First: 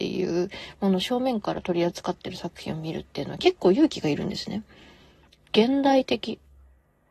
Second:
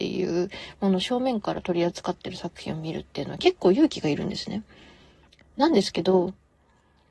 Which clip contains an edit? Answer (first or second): first